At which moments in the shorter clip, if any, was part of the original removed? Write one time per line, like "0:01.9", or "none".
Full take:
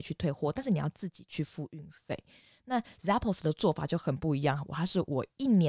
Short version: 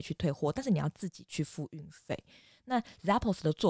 none